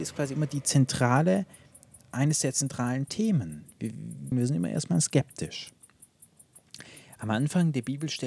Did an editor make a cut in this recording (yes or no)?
yes